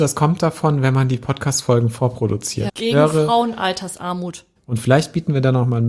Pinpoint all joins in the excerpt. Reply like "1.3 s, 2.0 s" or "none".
2.7 s, 4.6 s